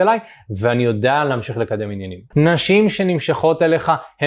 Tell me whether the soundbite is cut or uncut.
cut